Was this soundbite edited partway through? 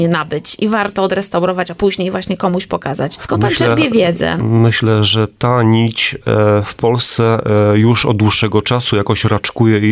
no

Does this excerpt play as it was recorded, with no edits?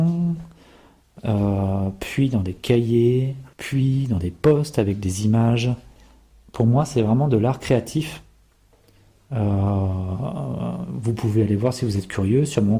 no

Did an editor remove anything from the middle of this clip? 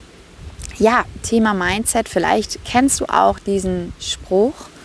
no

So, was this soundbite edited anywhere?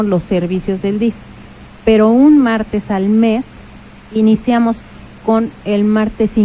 yes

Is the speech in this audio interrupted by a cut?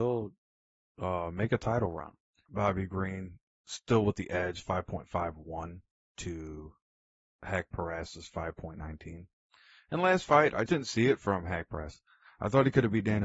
yes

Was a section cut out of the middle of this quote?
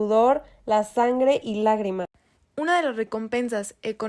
yes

